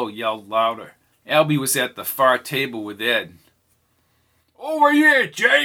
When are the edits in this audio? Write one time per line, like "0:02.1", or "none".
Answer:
0:01.1